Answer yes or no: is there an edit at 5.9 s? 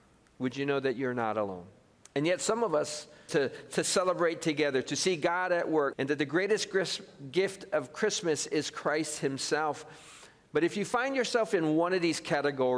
yes